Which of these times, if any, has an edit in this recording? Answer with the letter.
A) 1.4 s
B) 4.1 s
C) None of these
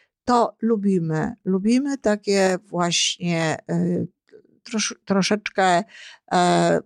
C